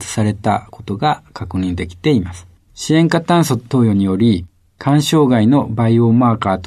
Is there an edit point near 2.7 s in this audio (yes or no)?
yes